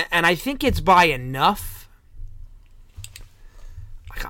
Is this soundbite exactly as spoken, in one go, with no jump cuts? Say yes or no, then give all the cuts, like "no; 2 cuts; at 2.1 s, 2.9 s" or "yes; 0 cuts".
yes; 0 cuts